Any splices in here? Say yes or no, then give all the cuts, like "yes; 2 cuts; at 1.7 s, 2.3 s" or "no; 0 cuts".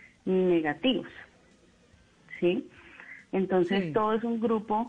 no; 0 cuts